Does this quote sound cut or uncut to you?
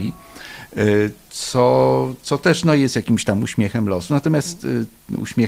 uncut